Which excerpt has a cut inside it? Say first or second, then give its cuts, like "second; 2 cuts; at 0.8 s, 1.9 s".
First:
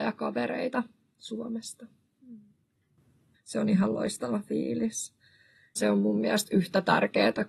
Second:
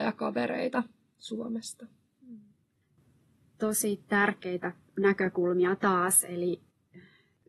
first; 2 cuts; at 3.3 s, 5.8 s